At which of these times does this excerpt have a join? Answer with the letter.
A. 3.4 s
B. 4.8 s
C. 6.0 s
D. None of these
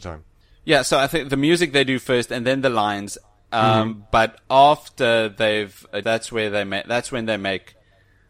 C